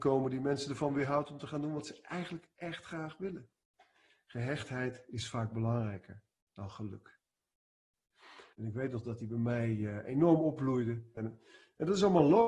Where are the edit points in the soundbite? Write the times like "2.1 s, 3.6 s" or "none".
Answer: 8.5 s, 11.2 s